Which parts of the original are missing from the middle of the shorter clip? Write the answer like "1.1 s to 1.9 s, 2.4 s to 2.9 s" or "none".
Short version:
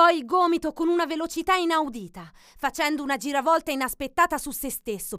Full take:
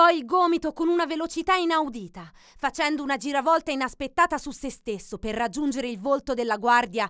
none